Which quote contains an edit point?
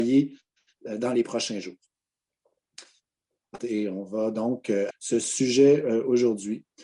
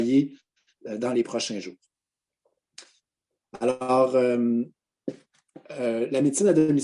first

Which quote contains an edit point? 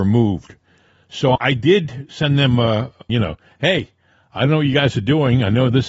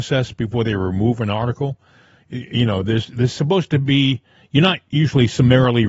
first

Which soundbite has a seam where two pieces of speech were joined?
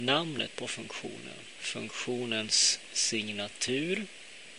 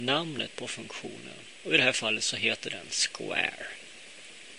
first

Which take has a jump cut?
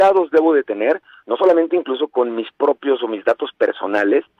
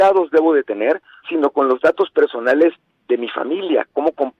second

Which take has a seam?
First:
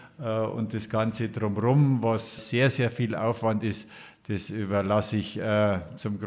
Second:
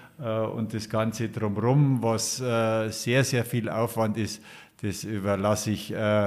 first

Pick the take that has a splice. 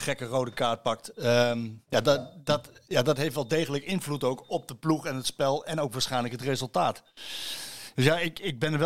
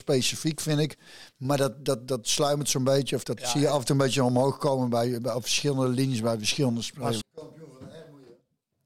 second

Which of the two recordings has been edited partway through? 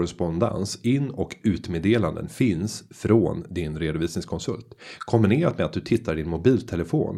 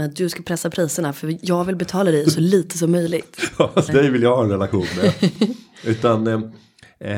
second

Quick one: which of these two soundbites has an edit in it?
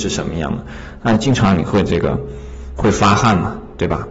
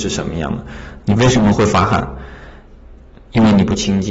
second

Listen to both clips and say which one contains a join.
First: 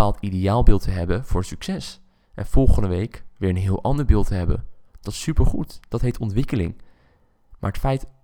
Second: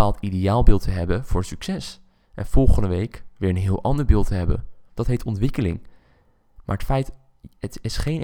second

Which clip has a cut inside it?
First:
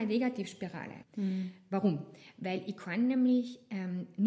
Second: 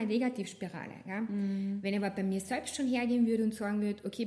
first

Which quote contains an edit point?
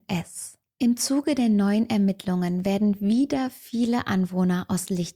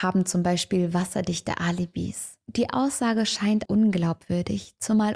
second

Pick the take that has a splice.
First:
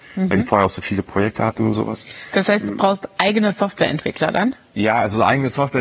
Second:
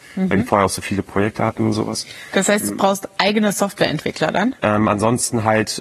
second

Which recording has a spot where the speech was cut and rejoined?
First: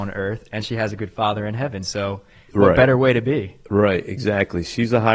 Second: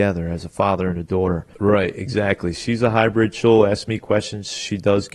second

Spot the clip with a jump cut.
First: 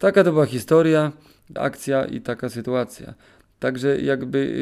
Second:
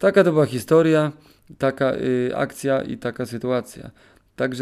first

